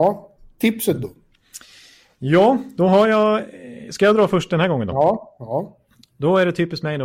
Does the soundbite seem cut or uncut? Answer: uncut